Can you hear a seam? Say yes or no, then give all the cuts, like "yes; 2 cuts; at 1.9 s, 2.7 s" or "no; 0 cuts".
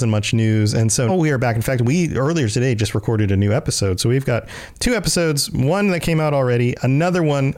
yes; 1 cut; at 1.1 s